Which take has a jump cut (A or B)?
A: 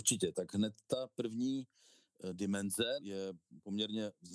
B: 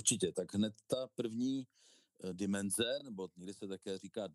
A